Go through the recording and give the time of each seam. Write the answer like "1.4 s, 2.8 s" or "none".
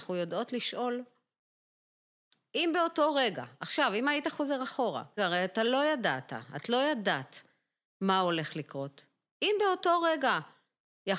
5.2 s